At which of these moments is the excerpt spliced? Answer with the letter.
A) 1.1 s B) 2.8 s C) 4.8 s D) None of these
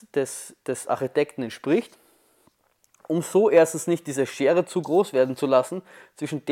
D